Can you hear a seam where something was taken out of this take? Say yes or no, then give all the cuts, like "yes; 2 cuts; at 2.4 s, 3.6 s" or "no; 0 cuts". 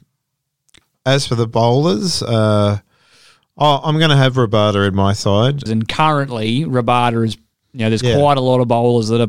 yes; 1 cut; at 5.7 s